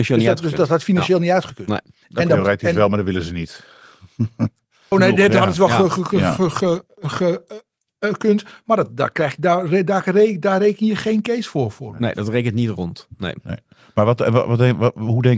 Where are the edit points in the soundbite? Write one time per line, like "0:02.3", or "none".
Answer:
0:04.9